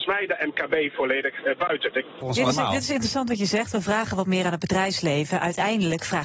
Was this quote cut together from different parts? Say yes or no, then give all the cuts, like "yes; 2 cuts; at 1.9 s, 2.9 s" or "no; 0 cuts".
yes; 1 cut; at 2.2 s